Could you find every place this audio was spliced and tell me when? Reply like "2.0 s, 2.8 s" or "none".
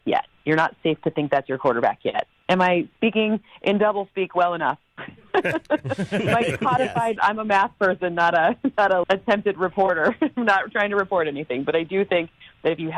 7.2 s, 9.0 s